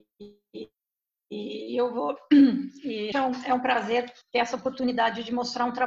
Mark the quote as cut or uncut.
cut